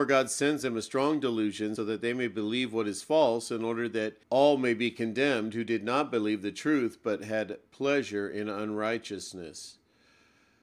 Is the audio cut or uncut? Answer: cut